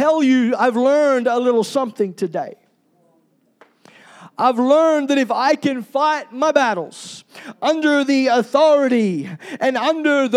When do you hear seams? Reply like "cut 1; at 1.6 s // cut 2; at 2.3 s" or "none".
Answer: none